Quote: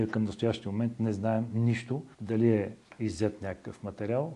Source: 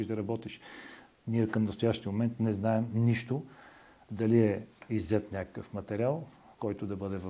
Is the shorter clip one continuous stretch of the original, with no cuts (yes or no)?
no